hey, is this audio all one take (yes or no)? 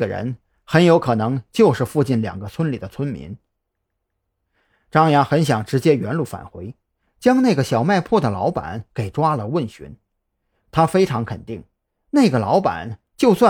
yes